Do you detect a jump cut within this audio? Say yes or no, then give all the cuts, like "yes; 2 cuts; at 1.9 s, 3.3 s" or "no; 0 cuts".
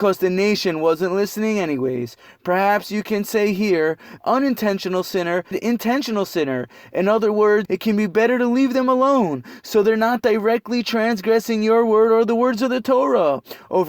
yes; 3 cuts; at 4.2 s, 5.5 s, 7.7 s